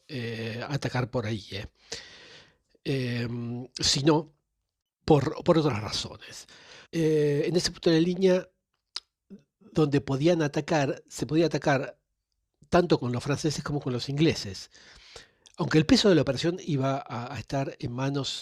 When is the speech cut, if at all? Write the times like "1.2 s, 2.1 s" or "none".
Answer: 6.9 s